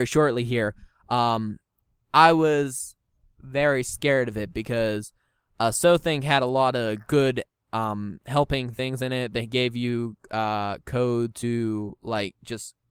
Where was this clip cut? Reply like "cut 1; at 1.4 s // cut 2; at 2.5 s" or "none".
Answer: cut 1; at 3.4 s